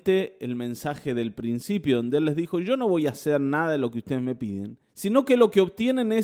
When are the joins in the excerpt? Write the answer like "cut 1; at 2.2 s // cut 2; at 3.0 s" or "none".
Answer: cut 1; at 4.9 s